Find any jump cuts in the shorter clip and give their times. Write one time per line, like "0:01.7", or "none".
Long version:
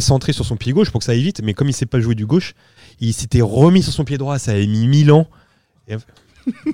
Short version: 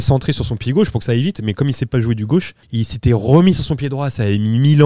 0:02.6